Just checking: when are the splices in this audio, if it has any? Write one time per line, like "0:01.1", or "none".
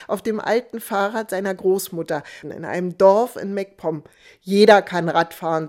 0:02.4

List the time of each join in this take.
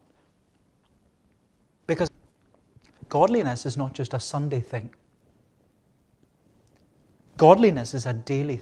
0:02.1

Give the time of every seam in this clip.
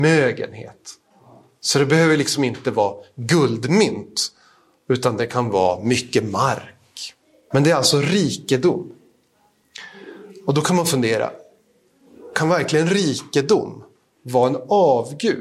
0:07.5

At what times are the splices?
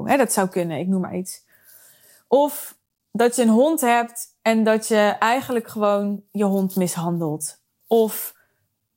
none

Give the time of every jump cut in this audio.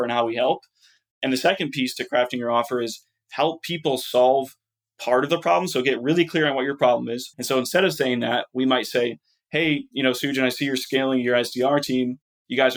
0:07.3

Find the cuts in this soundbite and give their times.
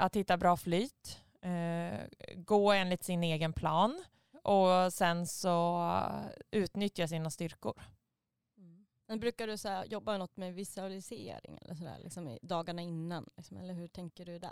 0:04.3

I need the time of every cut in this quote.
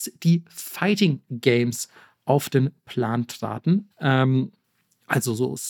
0:03.9

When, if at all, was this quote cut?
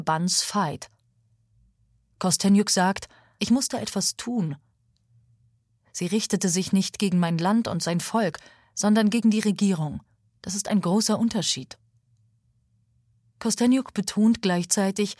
0:03.4

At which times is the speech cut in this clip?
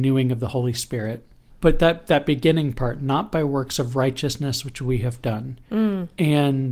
0:01.5

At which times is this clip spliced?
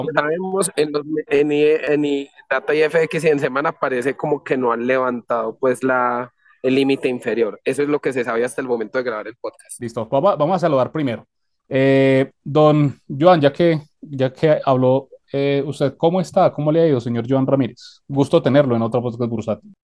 0:01.3

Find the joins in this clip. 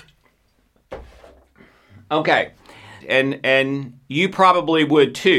0:03.0

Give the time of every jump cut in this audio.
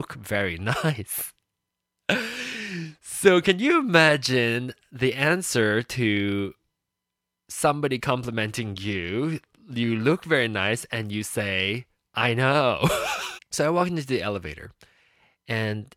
0:13.4

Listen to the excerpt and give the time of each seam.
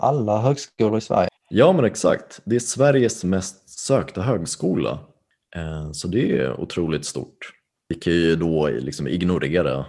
none

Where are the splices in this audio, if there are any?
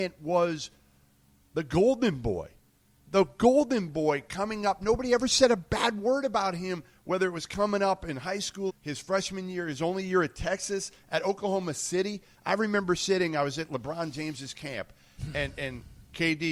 0:08.7
0:12.3

